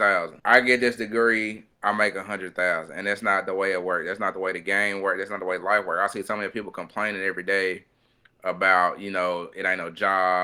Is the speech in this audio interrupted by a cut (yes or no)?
no